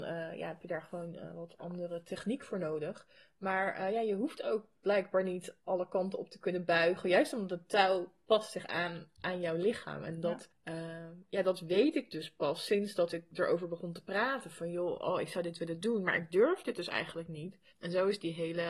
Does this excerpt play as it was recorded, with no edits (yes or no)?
no